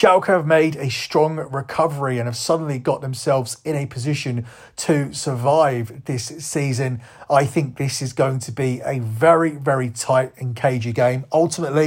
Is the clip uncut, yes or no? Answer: yes